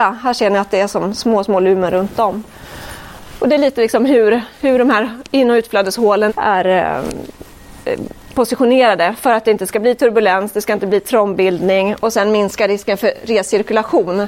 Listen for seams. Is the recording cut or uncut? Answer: cut